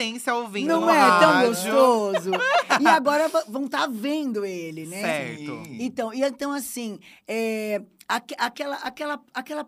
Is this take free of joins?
yes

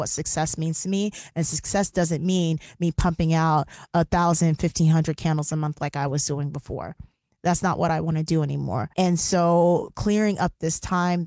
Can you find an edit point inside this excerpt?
yes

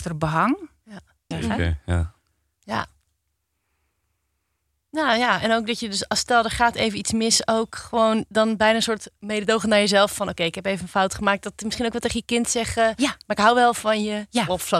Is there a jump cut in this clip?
yes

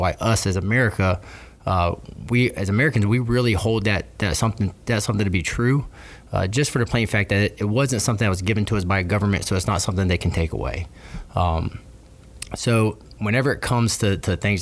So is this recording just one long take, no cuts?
no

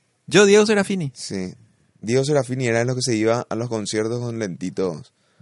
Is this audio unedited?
yes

